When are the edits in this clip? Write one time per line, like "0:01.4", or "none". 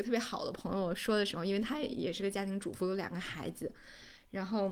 none